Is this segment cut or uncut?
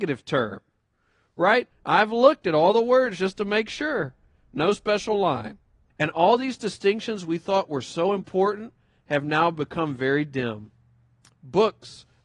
cut